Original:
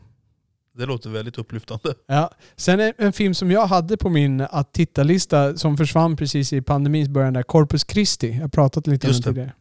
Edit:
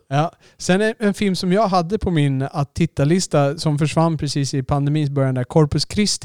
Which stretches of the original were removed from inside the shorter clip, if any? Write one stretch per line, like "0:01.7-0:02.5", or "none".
none